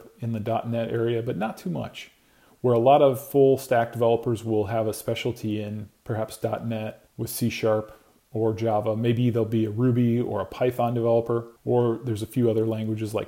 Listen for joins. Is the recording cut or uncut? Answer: cut